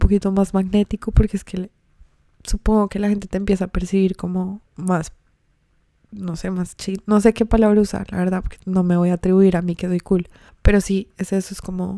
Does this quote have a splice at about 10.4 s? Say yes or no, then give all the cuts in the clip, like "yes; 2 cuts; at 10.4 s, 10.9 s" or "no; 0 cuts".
no; 1 cut; at 4.7 s